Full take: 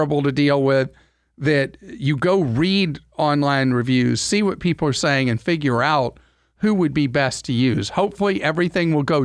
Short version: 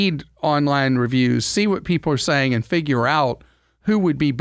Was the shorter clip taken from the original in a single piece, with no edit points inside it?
yes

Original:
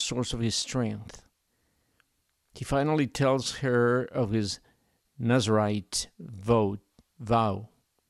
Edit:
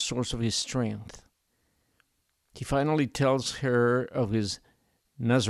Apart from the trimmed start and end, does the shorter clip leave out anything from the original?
no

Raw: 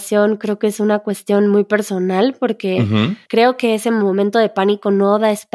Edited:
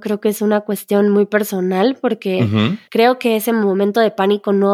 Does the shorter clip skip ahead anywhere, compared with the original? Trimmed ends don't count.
no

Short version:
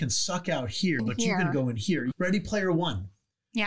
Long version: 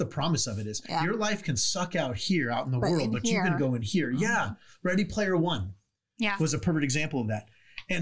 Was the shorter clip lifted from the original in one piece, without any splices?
no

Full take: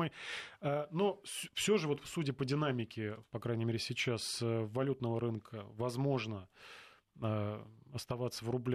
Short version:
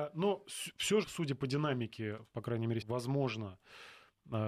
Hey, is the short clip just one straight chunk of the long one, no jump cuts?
no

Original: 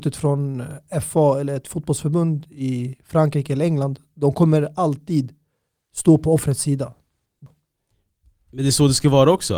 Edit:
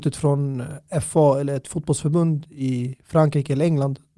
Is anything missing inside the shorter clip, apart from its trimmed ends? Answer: no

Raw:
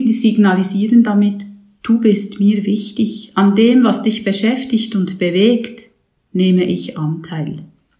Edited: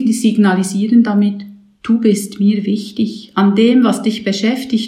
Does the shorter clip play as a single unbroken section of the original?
yes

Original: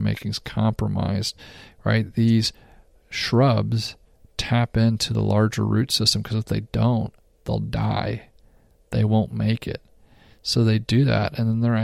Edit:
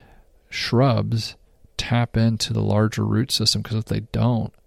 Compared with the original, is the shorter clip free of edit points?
yes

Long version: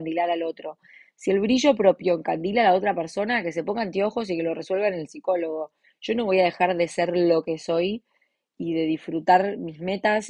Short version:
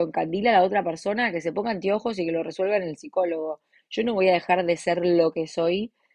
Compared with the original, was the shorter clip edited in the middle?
no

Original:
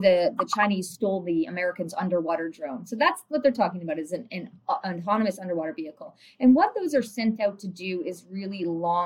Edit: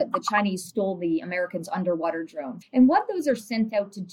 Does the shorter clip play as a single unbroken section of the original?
no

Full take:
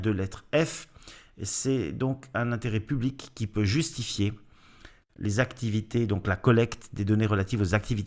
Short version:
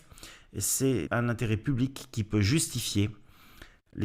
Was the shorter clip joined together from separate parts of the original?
yes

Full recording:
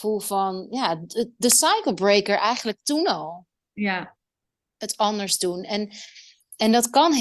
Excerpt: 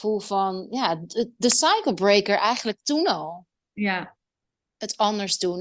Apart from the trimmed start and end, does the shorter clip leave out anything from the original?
no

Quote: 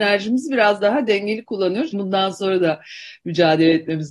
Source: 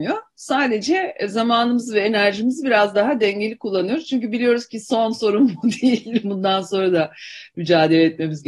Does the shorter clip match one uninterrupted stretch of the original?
no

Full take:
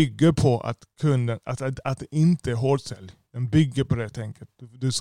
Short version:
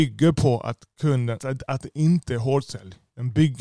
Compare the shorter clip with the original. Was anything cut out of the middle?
yes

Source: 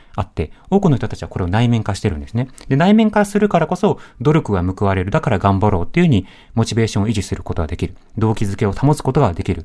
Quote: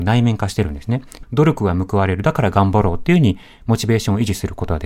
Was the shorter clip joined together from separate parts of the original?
yes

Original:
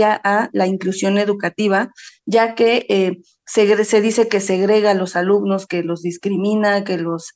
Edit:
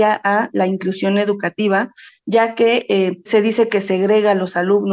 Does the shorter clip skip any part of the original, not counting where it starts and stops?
yes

